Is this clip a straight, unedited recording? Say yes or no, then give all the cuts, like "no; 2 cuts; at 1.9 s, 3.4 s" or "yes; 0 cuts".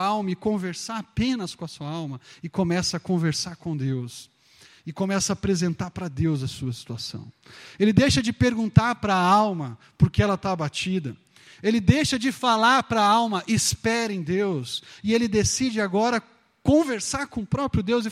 yes; 0 cuts